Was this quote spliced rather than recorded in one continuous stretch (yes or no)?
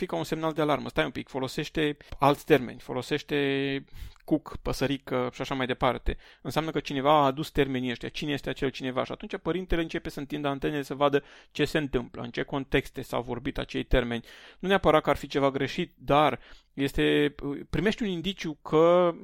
no